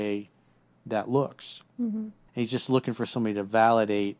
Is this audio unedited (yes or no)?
no